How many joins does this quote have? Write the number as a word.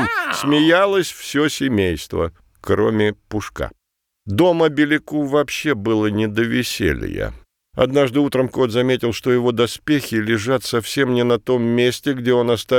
zero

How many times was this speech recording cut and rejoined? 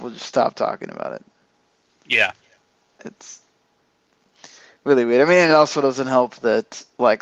zero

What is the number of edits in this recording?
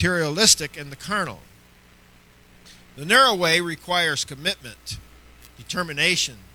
zero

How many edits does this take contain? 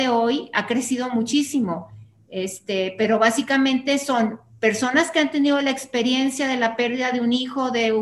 zero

